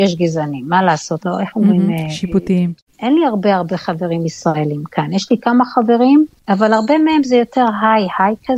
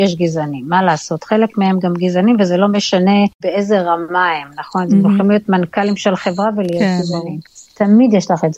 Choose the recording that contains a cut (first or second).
first